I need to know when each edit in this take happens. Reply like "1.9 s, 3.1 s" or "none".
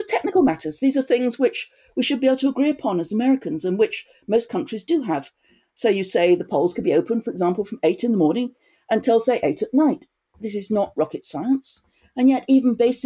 none